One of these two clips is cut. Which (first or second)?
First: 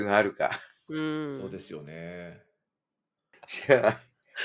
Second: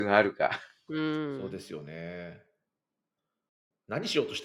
first